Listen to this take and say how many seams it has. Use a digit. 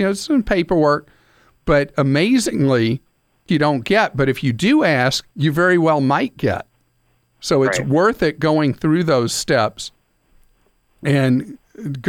2